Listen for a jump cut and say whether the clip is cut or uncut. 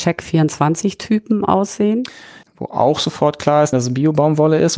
cut